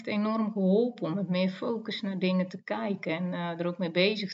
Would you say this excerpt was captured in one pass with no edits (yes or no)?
yes